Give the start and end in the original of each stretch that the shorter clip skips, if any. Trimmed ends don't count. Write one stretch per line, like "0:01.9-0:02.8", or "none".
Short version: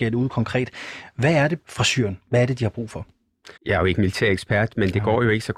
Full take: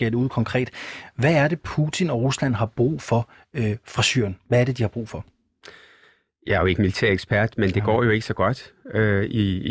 0:01.6-0:03.8
0:05.7-0:06.4